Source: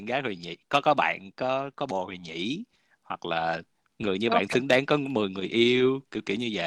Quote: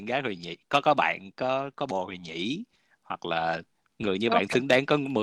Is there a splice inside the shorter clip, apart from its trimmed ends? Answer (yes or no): no